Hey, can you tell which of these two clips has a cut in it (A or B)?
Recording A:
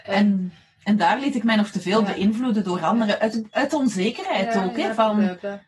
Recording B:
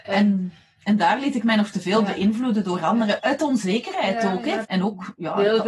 B